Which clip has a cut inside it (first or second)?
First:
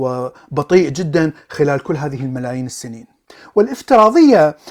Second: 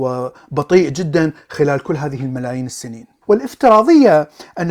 second